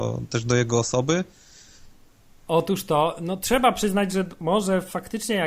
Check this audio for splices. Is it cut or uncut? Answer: cut